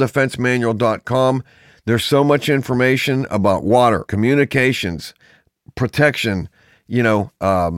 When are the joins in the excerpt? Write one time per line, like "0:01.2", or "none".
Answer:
0:04.1